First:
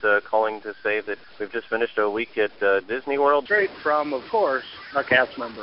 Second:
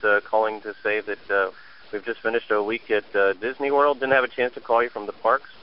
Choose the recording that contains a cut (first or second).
first